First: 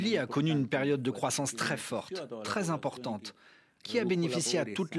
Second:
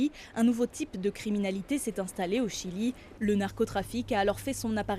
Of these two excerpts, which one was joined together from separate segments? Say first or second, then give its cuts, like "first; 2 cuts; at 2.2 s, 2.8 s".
second; 1 cut; at 3.2 s